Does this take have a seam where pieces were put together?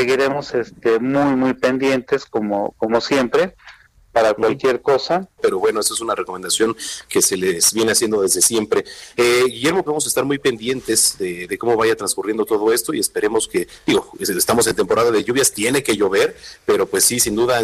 yes; 2 cuts; at 5.4 s, 9.9 s

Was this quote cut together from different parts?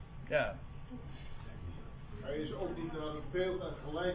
no; 0 cuts

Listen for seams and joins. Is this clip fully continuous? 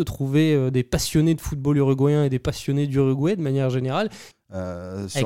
no; 1 cut; at 4.3 s

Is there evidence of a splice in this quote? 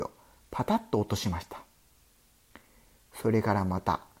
no; 0 cuts

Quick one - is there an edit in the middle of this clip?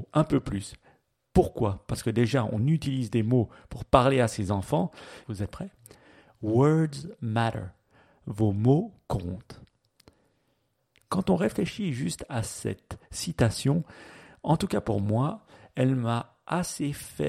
yes; 1 cut; at 5.2 s

